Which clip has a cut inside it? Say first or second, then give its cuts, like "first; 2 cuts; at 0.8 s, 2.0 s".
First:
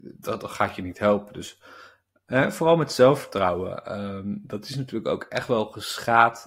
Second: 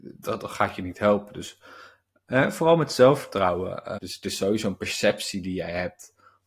second; 1 cut; at 4.0 s